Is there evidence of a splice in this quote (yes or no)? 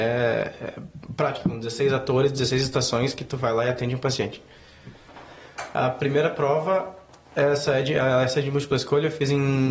no